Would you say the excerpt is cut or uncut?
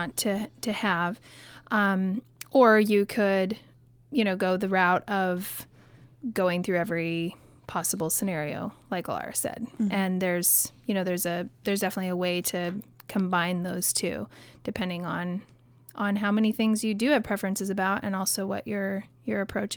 uncut